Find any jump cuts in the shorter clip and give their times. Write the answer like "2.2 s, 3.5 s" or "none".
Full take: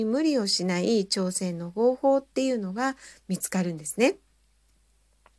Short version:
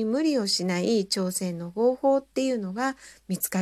none